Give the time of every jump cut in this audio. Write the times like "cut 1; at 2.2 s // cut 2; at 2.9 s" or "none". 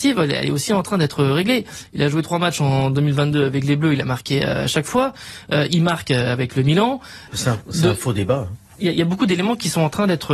cut 1; at 7.3 s